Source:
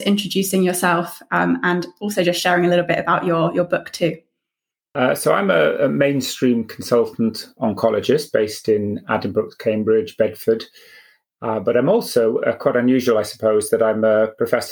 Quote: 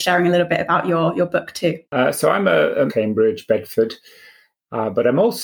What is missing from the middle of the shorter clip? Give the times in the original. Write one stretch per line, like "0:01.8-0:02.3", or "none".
0:04.2-0:04.9
0:05.9-0:09.6